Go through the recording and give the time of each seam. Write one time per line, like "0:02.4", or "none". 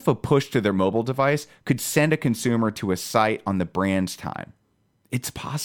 none